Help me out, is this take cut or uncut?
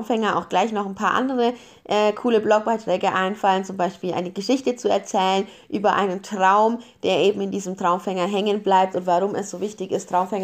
uncut